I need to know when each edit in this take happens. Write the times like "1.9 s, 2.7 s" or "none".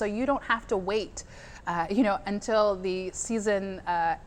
none

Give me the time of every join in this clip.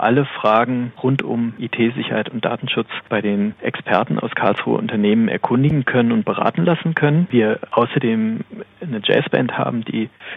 none

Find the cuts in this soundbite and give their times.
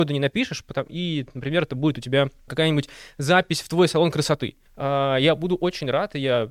2.5 s, 4.7 s

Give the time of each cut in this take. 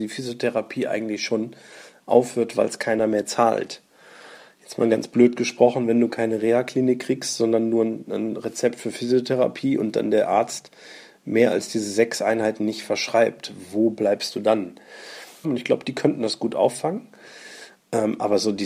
15.4 s

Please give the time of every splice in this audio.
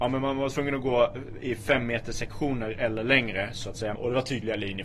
3.9 s

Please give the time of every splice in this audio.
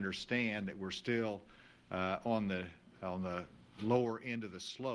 none

